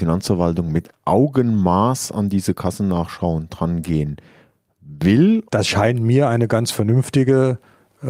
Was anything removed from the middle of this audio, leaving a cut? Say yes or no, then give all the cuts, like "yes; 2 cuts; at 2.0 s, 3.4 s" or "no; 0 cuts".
yes; 1 cut; at 5.5 s